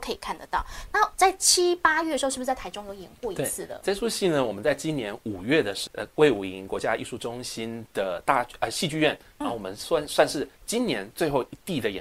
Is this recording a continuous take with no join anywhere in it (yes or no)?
no